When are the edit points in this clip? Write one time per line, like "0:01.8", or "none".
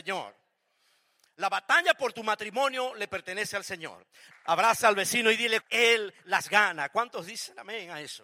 0:04.3
0:05.6